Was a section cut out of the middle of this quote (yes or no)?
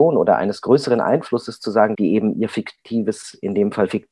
yes